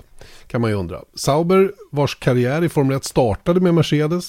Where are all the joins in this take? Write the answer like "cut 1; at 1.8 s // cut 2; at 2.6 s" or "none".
none